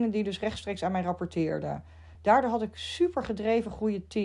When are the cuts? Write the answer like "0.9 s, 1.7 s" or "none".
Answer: none